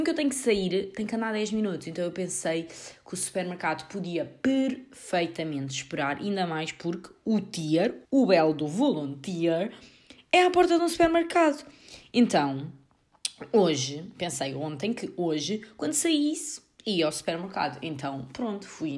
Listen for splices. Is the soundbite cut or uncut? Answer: cut